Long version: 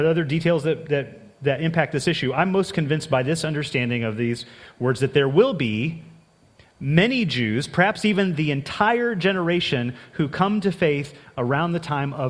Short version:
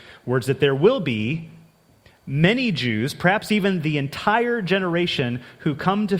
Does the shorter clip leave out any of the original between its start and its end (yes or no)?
no